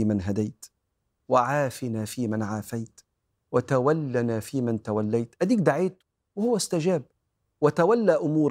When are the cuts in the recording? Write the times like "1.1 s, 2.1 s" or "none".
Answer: none